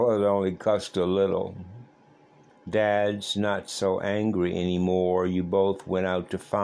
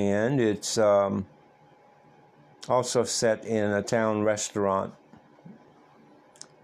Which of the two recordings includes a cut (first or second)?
first